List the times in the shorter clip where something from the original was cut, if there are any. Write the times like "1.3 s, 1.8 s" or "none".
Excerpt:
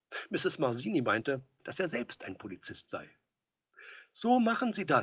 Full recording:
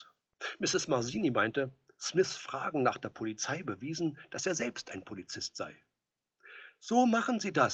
1.6 s